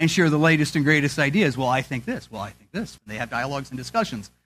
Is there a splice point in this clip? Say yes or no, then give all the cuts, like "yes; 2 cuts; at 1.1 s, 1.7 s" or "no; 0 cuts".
yes; 1 cut; at 3.0 s